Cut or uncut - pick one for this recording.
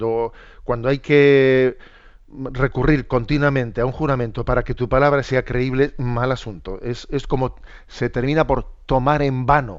uncut